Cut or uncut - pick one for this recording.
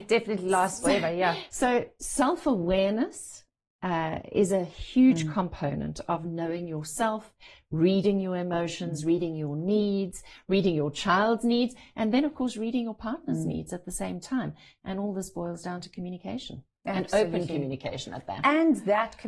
uncut